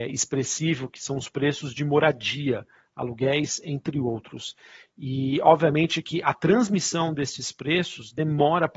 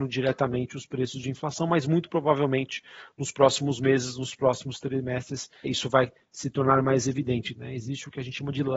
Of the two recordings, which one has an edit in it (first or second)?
second